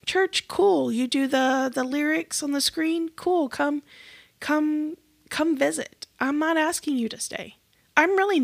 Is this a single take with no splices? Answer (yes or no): yes